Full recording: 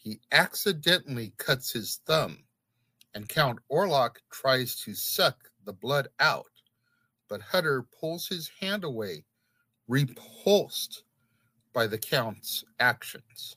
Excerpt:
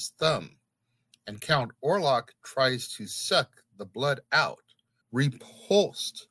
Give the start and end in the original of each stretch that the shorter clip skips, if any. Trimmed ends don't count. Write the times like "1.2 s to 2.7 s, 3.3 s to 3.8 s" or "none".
6.9 s to 9.8 s